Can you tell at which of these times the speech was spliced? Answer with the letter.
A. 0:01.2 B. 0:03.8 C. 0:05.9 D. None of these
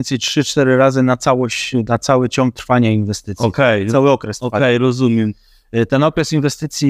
D